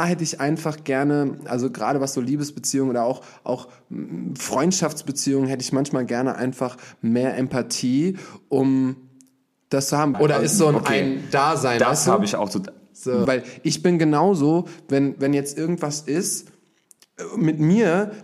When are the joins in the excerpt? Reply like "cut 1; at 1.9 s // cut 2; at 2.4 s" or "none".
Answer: cut 1; at 10.1 s // cut 2; at 13.3 s